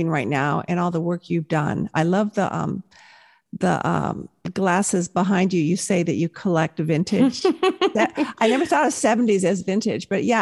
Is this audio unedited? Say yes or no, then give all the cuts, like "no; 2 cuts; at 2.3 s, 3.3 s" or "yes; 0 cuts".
yes; 0 cuts